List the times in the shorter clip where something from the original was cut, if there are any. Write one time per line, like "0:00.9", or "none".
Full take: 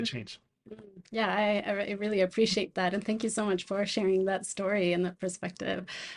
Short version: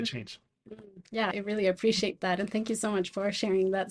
0:01.3